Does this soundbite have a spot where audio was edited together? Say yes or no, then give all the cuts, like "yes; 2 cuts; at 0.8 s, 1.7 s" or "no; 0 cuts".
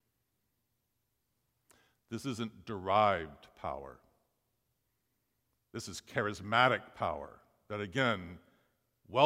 no; 0 cuts